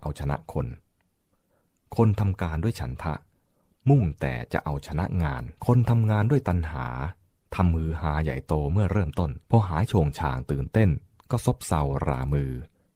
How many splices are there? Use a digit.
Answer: 2